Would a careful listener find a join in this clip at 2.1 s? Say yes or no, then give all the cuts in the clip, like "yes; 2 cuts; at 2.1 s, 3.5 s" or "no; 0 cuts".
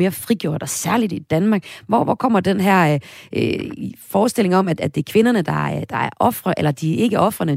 no; 0 cuts